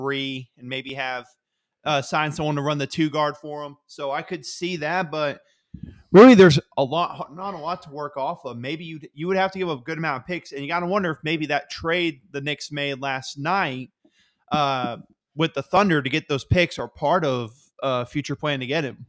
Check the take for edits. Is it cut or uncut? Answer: uncut